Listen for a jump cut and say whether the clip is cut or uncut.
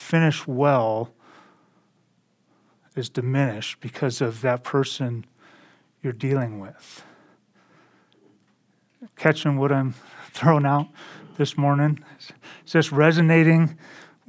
cut